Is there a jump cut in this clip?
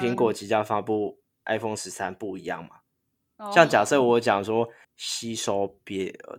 yes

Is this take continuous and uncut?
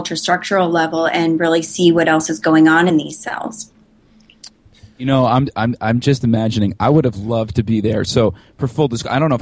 yes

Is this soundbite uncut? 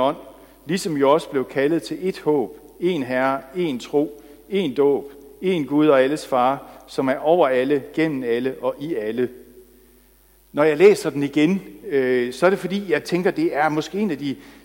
yes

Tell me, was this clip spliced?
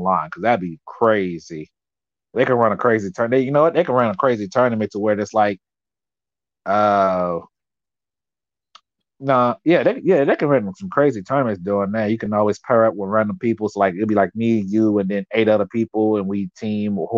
no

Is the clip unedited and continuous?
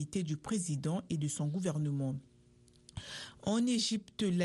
yes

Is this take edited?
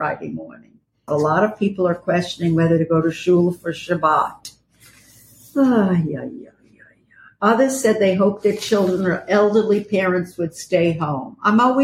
yes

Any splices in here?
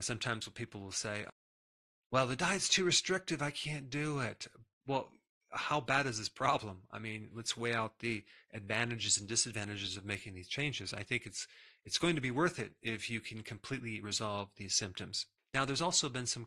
no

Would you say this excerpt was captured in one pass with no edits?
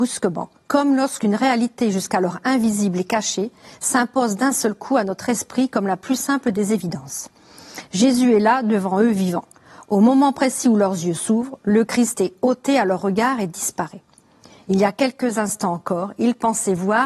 yes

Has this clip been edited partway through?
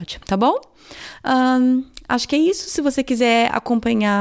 no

